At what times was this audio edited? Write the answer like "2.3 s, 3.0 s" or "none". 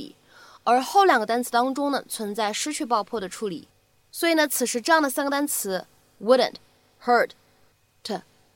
none